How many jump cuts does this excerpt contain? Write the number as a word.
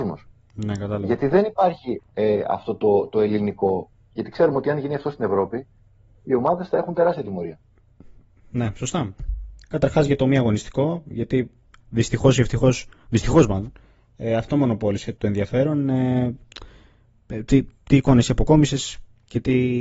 two